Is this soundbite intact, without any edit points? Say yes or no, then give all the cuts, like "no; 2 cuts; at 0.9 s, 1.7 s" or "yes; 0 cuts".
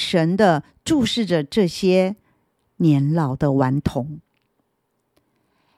yes; 0 cuts